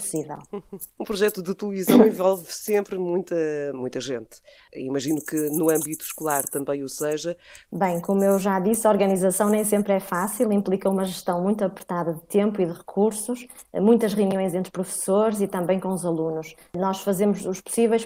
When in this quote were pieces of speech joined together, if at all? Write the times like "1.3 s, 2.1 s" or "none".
4.7 s, 7.7 s